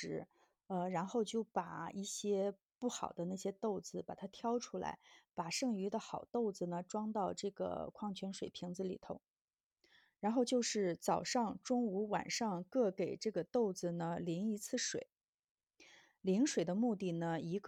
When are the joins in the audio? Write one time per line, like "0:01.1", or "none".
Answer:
none